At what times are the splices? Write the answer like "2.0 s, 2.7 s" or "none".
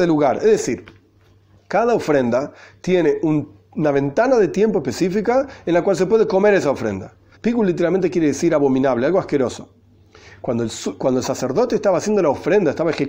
7.3 s